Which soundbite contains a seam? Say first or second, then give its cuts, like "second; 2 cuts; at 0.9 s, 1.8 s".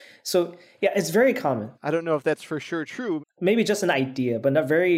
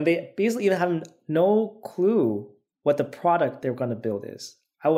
first; 2 cuts; at 1.7 s, 3.2 s